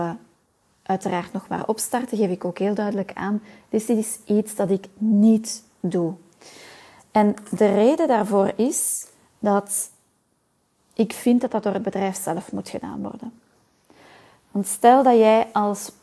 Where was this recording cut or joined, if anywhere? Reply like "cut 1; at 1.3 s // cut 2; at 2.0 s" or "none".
none